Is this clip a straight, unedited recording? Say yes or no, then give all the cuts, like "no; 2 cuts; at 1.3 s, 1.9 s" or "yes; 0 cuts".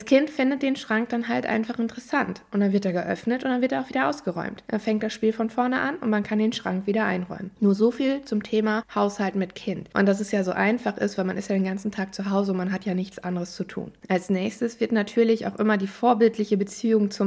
yes; 0 cuts